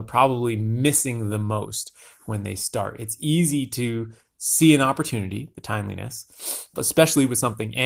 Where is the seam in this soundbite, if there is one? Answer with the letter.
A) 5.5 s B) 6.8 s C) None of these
B